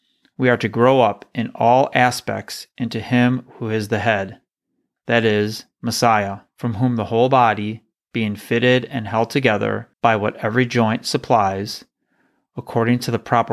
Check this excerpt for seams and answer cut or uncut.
cut